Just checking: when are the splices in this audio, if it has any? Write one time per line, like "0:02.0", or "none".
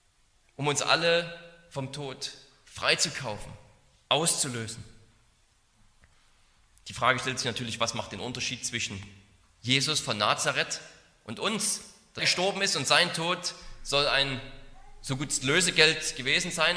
0:12.2